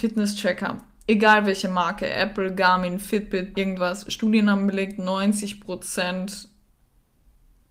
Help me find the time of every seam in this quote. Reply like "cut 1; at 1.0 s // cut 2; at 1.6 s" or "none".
cut 1; at 3.5 s